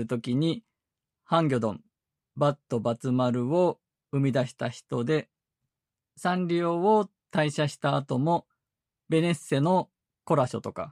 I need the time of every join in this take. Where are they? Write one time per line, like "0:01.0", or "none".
none